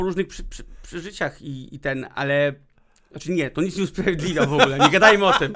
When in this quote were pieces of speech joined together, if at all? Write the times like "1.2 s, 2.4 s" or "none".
none